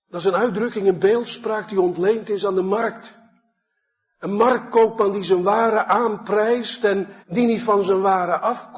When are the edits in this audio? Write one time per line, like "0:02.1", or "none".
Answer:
0:07.2